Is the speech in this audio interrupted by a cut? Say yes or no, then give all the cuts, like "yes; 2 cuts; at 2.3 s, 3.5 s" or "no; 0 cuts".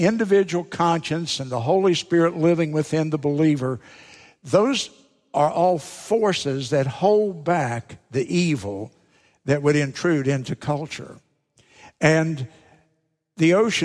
no; 0 cuts